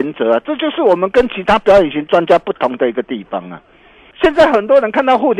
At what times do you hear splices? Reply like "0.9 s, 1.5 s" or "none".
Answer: 4.1 s